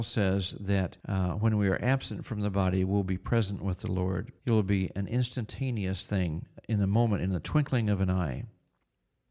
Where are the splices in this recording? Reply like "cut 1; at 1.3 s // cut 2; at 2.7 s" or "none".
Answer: cut 1; at 1.0 s // cut 2; at 4.4 s